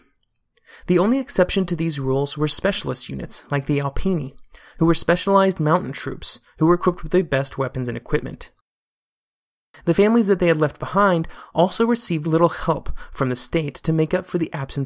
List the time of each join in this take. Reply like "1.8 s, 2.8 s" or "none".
9.8 s, 12.2 s